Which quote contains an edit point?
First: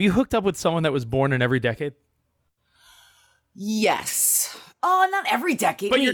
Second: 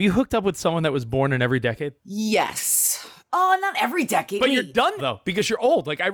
second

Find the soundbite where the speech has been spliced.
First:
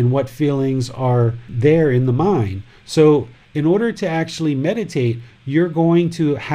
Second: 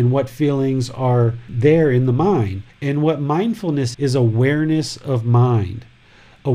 second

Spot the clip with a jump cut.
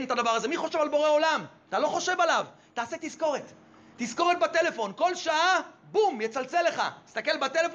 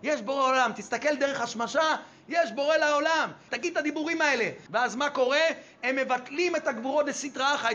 second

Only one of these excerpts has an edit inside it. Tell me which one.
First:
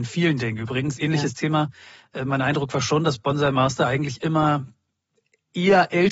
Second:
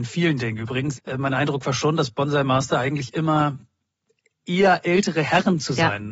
second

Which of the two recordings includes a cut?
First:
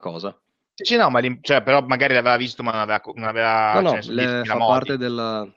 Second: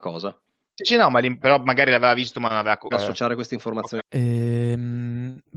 second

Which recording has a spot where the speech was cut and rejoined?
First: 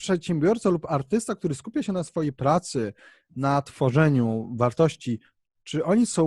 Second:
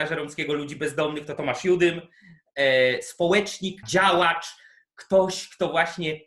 second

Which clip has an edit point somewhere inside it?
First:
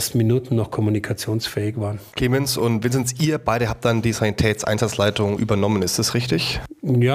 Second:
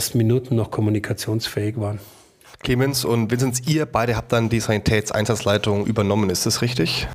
first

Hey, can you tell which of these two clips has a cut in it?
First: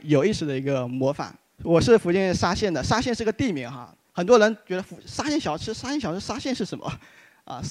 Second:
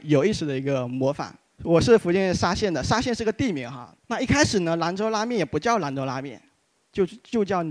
second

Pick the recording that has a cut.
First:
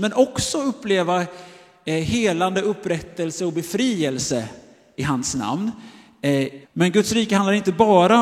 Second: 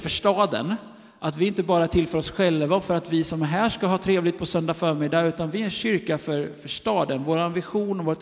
first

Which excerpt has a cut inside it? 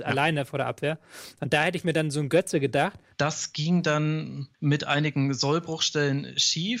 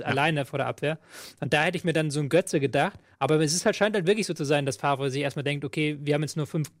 first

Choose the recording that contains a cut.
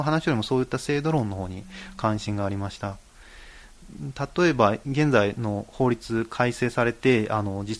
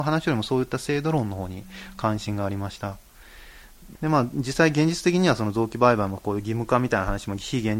second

